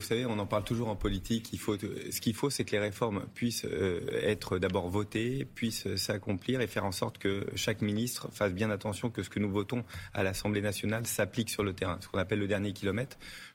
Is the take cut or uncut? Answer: uncut